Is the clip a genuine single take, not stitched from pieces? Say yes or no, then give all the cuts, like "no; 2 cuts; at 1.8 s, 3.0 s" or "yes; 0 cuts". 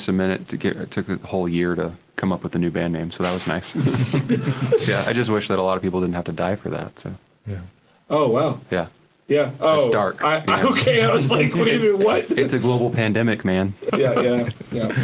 no; 2 cuts; at 1.2 s, 13.9 s